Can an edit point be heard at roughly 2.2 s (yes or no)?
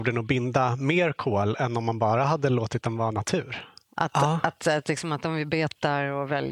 no